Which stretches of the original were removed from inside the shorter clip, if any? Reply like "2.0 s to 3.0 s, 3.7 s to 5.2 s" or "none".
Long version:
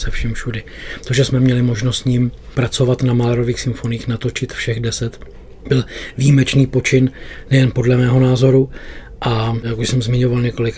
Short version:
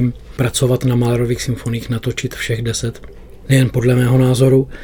5.6 s to 7.4 s

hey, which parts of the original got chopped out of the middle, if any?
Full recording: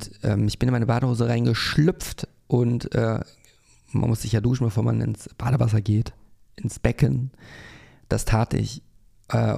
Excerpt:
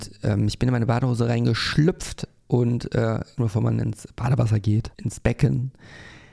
3.4 s to 4.6 s, 6.2 s to 6.5 s

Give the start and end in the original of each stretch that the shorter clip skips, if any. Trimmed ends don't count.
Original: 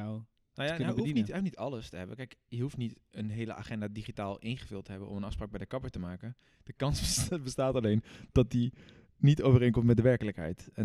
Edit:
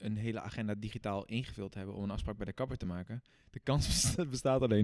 none

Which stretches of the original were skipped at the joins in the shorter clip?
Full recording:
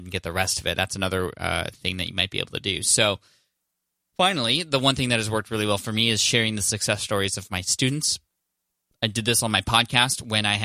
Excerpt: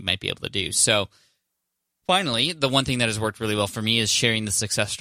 none

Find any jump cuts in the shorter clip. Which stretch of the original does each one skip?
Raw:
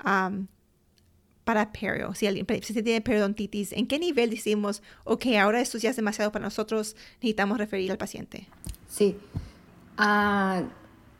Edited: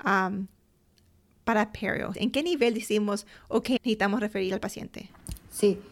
2.1 s to 3.7 s, 5.3 s to 7.1 s

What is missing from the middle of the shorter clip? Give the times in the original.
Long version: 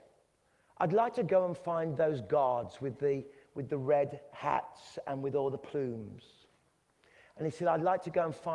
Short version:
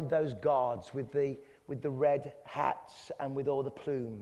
none

